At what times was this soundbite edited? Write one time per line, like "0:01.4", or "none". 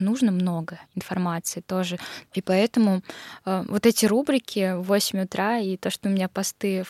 0:02.3